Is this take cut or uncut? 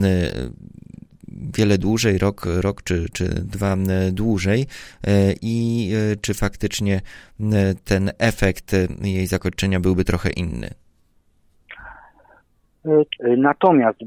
cut